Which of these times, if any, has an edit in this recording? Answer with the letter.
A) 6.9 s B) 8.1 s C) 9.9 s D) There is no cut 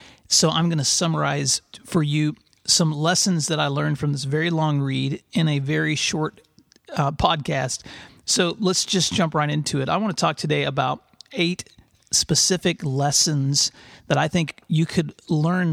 D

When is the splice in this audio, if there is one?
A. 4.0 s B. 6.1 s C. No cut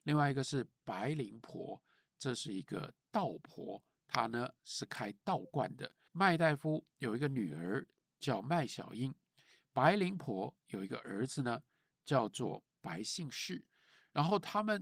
B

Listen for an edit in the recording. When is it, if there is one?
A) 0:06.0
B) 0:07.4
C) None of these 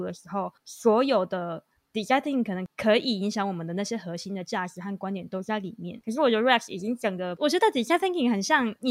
A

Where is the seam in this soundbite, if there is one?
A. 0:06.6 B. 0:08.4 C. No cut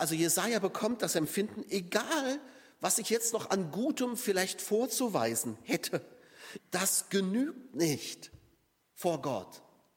A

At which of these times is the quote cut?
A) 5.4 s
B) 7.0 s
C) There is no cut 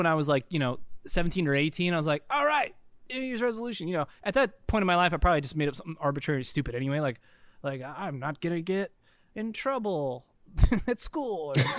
C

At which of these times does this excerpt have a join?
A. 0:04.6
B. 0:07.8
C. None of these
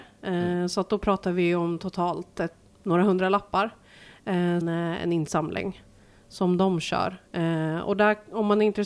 A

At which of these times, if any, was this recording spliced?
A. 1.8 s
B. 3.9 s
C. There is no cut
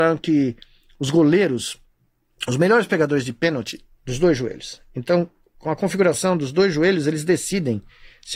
B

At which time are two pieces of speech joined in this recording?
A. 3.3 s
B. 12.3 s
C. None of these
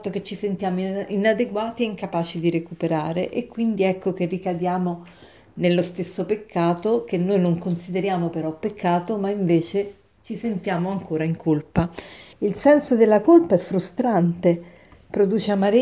B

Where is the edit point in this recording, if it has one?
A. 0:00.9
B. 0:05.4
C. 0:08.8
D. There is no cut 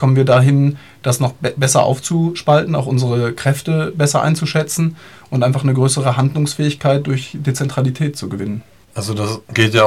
C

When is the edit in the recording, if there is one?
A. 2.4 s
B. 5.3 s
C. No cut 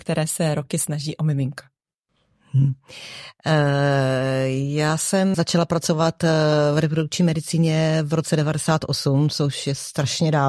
B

